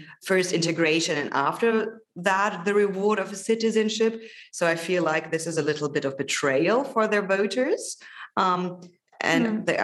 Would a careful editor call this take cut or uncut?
uncut